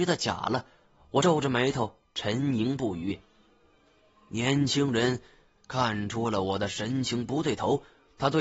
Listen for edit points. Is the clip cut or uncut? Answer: uncut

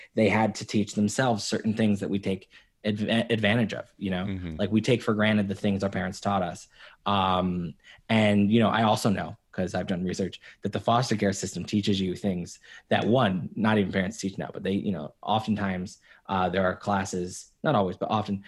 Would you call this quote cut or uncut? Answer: uncut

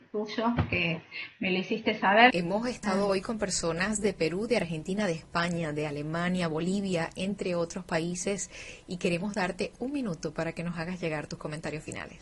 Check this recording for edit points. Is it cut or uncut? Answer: cut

